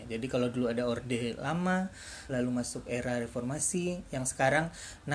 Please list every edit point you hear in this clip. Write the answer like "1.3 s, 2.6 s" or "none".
2.3 s